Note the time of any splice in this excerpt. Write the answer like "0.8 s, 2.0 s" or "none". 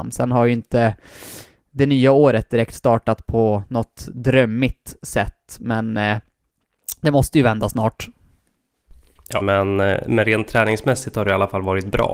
9.4 s